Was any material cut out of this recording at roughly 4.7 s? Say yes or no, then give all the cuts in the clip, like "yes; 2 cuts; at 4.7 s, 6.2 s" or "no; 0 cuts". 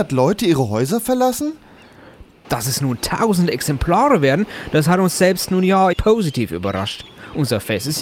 no; 2 cuts; at 2.4 s, 5.9 s